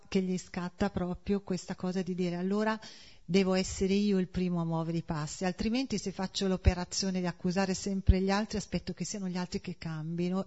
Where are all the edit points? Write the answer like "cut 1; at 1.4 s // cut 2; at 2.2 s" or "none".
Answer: none